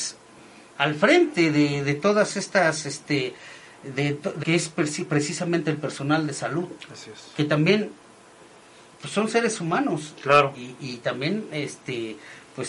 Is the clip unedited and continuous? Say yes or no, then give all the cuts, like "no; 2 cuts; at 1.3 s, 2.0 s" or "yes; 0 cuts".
no; 1 cut; at 4.4 s